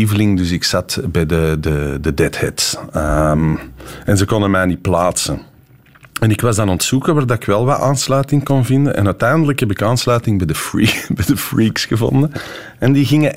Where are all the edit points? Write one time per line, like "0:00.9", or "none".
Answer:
none